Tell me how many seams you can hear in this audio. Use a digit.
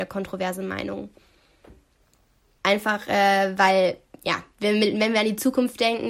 1